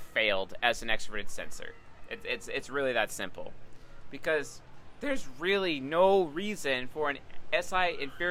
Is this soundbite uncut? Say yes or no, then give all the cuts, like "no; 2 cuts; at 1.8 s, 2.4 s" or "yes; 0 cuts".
yes; 0 cuts